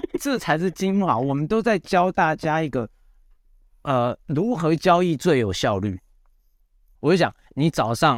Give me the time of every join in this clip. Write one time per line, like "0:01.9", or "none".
0:06.9

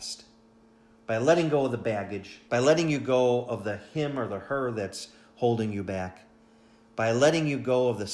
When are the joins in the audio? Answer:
0:02.5

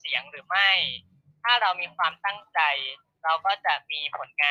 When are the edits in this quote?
none

